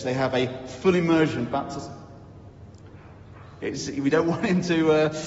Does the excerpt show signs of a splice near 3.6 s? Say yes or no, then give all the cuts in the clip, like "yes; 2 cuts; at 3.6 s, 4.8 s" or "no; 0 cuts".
yes; 1 cut; at 3.6 s